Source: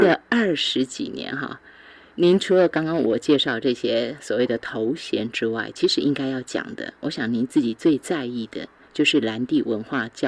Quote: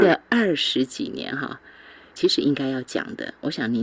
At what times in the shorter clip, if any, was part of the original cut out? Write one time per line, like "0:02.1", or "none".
0:02.1